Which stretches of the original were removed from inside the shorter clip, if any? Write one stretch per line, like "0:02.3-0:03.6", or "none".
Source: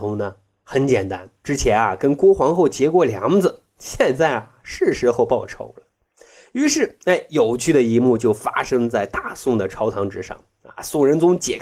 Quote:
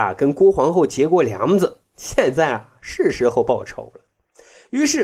none